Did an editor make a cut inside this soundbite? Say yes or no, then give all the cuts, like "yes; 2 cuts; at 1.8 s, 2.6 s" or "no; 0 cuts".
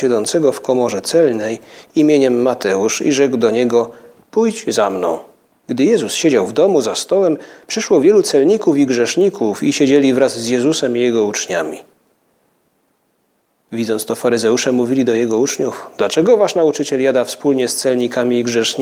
yes; 1 cut; at 5.5 s